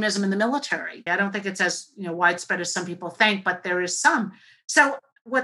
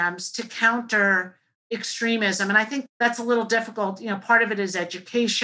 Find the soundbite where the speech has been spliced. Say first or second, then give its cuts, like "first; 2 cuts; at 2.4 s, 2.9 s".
first; 1 cut; at 1.1 s